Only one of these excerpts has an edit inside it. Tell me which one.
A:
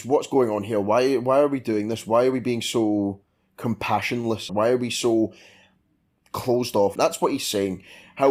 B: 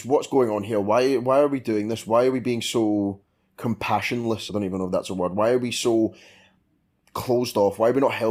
A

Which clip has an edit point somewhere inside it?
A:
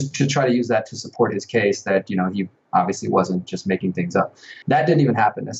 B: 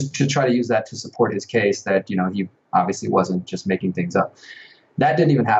A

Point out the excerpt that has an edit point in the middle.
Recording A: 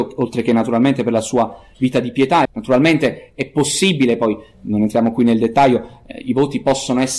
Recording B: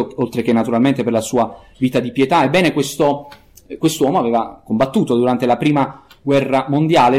A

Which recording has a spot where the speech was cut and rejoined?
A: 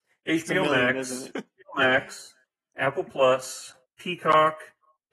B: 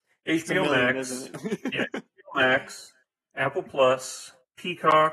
A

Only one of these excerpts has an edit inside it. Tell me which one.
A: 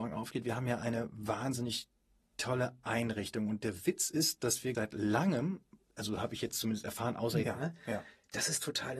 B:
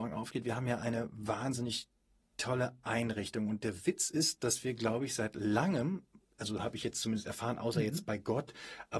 A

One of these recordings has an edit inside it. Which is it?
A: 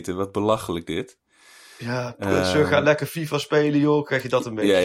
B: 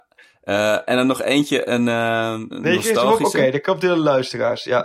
B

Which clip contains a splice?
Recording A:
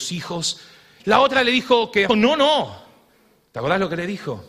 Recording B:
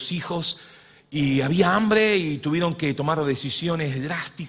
A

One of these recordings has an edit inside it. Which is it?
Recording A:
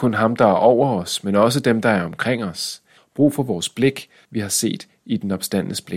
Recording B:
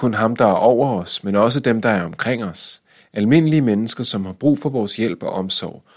A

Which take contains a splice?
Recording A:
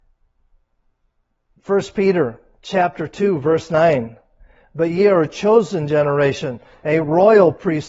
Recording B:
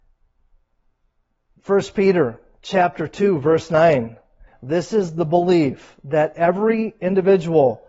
B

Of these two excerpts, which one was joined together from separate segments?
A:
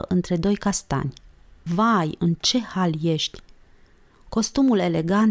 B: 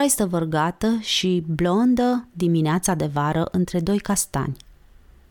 A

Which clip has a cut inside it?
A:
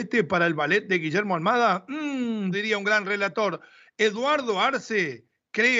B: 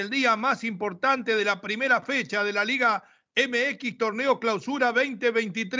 A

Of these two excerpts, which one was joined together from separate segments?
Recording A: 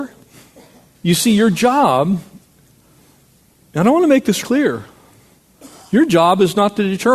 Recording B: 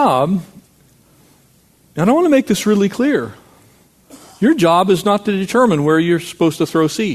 A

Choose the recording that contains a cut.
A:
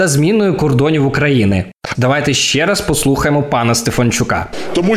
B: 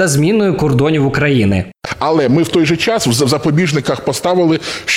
A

